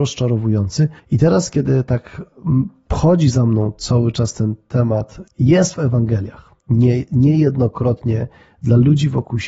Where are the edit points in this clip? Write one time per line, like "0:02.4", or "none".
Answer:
0:01.0
0:05.3
0:06.6